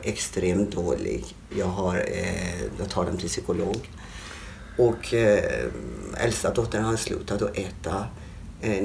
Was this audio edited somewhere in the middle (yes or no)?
yes